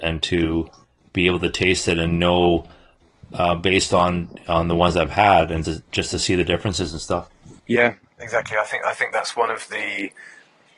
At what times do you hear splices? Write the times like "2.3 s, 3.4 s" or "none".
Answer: 5.6 s, 7.6 s